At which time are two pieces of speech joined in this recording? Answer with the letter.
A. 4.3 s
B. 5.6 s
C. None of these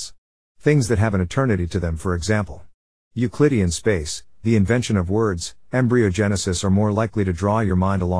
C